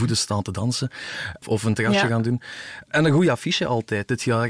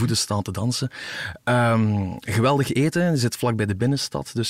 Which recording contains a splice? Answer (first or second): first